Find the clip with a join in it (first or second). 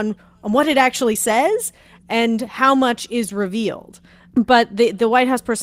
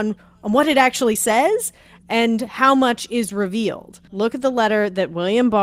second